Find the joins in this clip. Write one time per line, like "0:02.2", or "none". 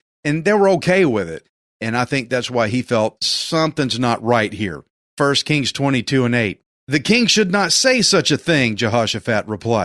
0:01.7
0:05.0
0:06.7